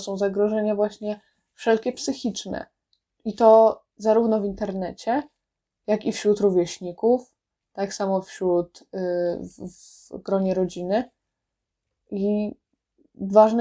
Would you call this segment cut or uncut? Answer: uncut